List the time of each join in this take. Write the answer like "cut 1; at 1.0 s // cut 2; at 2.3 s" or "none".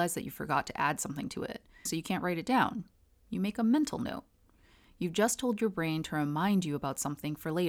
cut 1; at 1.9 s